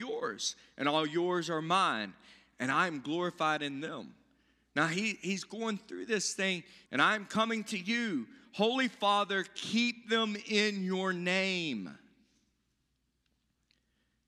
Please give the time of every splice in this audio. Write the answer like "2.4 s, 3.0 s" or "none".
6.9 s